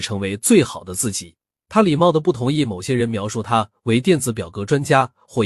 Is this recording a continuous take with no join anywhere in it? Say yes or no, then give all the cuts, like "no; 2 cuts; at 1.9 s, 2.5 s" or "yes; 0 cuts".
yes; 0 cuts